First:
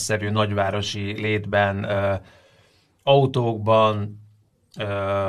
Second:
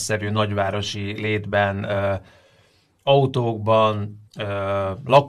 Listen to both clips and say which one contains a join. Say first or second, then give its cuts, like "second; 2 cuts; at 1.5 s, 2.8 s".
second; 1 cut; at 4.3 s